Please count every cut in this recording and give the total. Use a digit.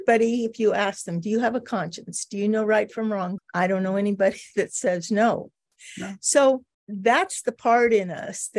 2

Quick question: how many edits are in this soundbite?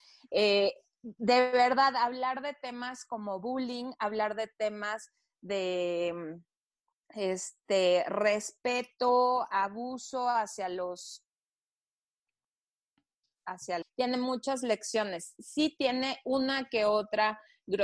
1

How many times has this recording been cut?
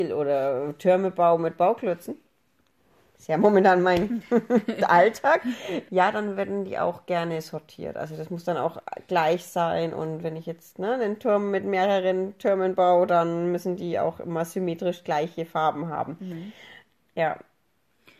1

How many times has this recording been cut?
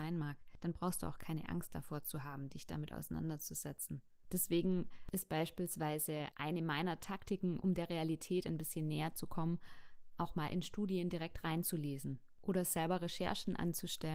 1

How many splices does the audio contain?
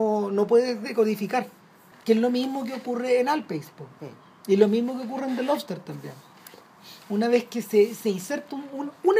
1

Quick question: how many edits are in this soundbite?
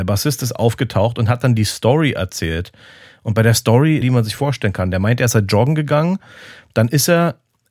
1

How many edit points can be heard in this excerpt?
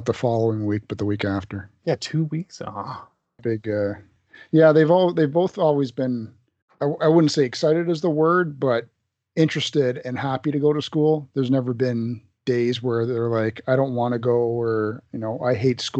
1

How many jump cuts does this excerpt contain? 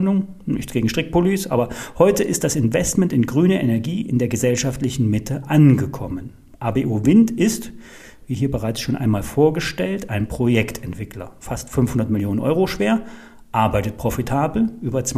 0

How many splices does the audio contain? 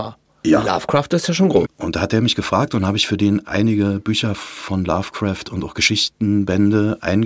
1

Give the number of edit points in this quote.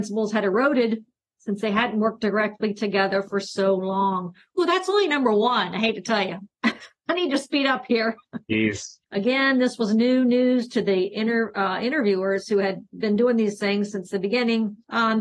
1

